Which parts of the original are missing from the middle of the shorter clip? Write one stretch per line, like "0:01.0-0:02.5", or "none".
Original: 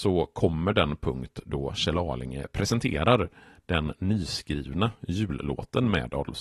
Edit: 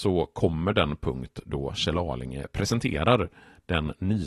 none

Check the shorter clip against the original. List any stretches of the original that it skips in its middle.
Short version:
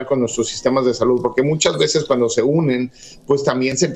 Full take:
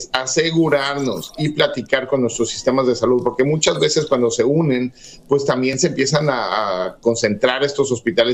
none

